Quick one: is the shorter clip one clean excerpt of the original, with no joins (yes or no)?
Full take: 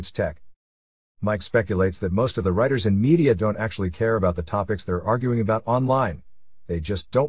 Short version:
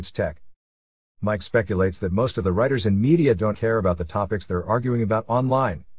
no